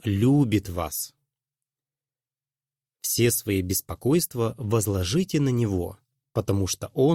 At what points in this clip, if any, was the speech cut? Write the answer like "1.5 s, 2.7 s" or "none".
none